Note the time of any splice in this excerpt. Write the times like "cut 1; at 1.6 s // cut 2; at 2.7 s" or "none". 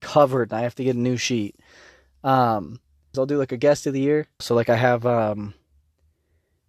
cut 1; at 3.1 s // cut 2; at 4.4 s